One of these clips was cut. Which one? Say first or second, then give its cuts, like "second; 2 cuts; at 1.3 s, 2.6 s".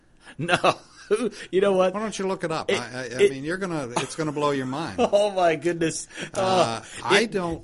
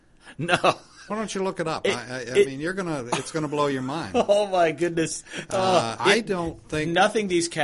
second; 2 cuts; at 1.1 s, 6.0 s